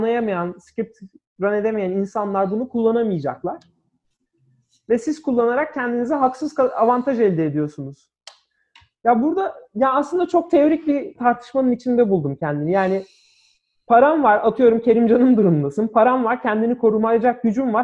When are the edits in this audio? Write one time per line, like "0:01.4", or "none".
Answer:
none